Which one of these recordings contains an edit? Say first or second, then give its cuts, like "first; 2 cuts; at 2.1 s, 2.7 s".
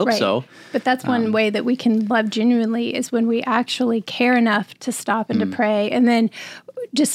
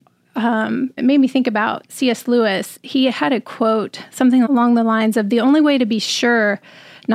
second; 2 cuts; at 1.0 s, 4.5 s